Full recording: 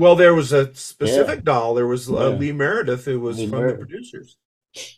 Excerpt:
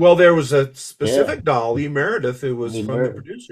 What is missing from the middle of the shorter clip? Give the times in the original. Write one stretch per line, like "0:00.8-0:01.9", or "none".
0:01.7-0:02.4